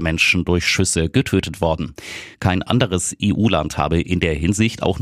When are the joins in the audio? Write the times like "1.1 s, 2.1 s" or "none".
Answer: 2.3 s